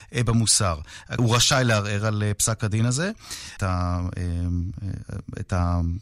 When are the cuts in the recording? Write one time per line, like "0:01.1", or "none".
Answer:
0:01.2
0:03.6